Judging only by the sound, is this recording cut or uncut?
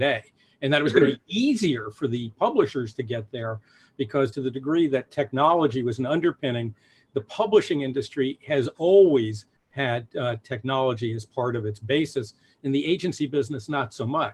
uncut